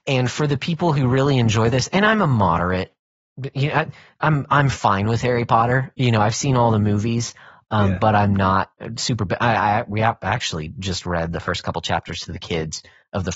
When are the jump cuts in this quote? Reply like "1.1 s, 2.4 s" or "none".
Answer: none